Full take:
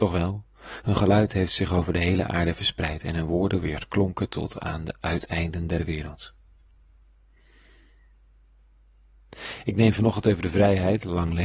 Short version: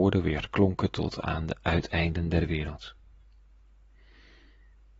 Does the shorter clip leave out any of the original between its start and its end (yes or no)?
no